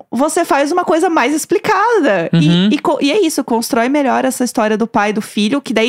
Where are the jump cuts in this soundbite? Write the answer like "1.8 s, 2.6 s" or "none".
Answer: none